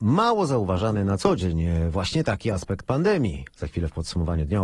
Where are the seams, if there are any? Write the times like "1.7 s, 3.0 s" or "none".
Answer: 3.5 s

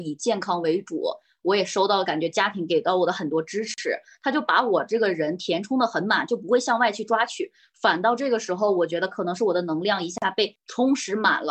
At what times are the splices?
none

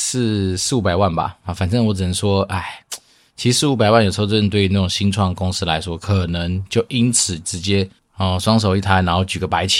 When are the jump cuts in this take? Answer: none

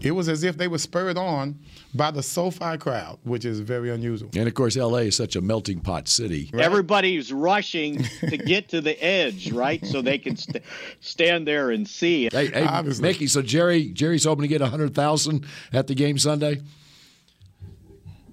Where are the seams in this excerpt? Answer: 6.5 s, 12.3 s

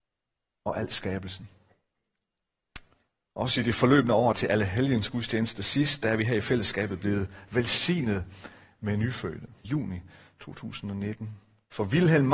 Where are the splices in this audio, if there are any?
4.3 s, 9.6 s

